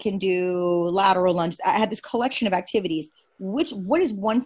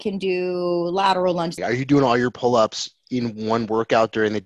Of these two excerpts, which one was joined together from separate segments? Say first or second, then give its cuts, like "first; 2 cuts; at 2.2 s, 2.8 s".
second; 1 cut; at 1.6 s